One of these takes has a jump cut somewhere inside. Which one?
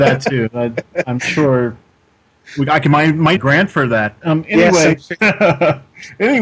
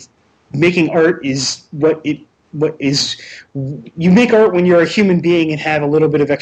first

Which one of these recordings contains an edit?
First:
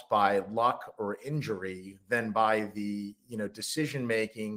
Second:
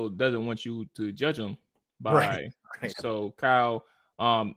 second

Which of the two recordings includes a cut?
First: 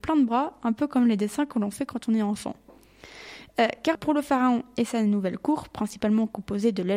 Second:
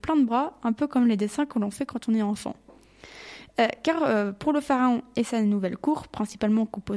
first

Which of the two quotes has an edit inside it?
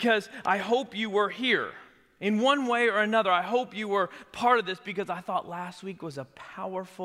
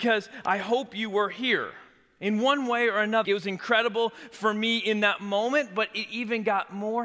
second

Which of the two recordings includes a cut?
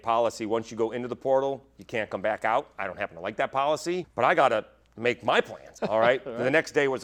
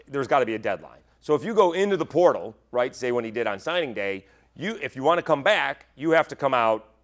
first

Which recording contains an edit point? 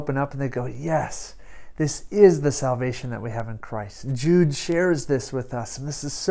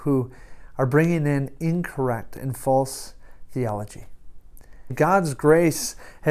second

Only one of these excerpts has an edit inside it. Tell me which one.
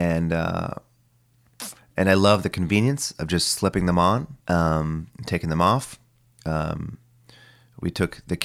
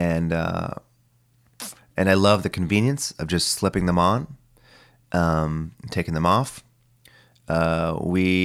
first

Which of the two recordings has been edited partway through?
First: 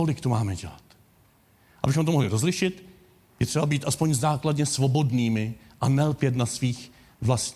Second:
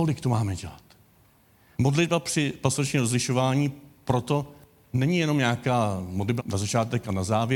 second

